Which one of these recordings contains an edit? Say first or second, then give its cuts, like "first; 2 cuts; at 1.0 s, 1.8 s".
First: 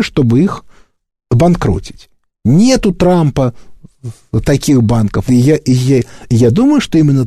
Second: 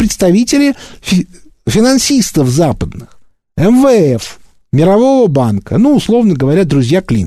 first; 1 cut; at 5.3 s